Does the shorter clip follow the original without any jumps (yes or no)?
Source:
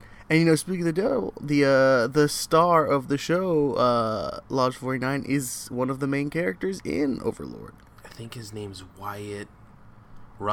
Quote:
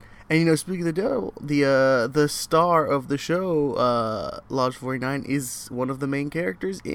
yes